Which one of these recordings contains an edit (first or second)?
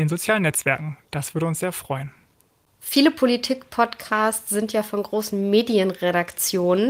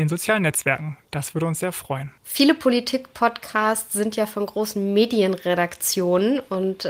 second